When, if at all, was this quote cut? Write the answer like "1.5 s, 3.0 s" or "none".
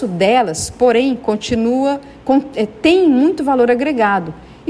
none